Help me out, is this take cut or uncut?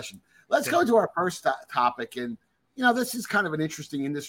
uncut